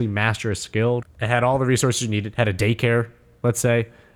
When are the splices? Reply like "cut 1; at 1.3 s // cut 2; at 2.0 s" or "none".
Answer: cut 1; at 1.0 s